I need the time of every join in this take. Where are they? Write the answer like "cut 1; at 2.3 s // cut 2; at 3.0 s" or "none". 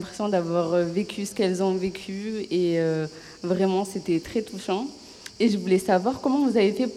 none